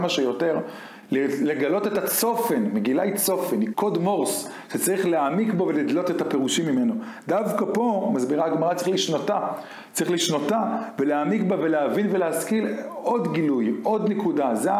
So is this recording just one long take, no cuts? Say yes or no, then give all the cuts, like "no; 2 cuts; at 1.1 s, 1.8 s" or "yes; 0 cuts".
no; 1 cut; at 3.7 s